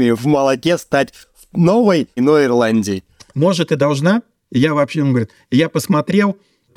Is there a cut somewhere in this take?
yes; 2 cuts; at 2.2 s, 4.5 s

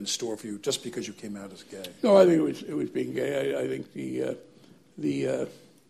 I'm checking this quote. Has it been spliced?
no; 0 cuts

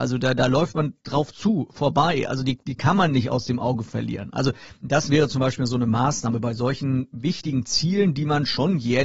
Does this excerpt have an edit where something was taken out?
no; 0 cuts

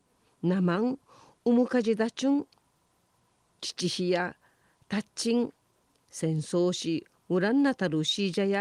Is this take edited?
no; 0 cuts

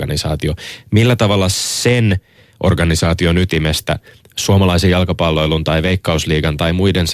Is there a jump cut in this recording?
no; 0 cuts

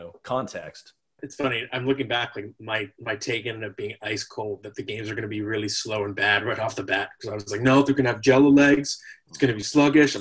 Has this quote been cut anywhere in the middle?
yes; 1 cut; at 1.2 s

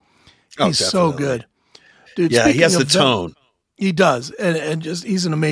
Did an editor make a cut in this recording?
no; 0 cuts

